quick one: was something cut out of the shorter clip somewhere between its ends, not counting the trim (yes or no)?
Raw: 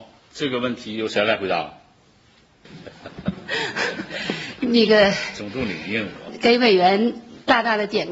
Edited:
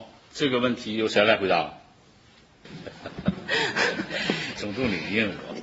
yes